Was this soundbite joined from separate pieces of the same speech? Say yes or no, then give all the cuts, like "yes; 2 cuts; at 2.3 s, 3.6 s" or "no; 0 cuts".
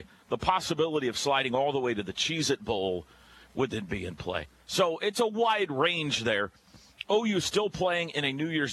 no; 0 cuts